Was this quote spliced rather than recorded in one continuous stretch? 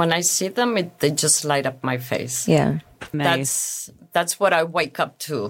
yes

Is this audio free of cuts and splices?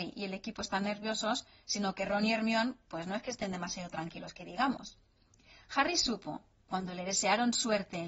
yes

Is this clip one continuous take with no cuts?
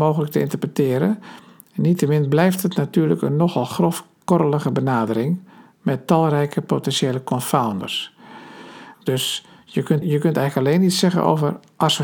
no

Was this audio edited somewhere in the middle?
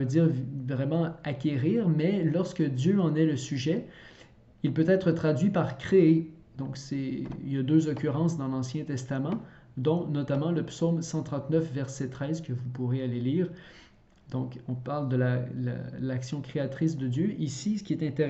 no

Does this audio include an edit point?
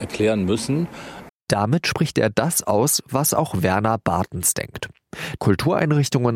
yes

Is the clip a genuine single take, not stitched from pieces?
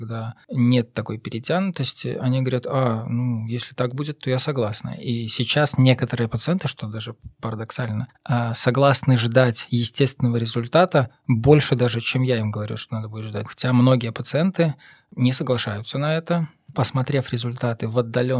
no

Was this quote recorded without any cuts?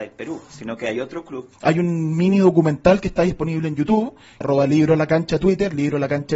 no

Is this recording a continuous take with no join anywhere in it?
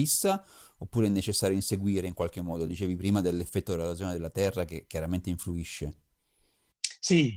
yes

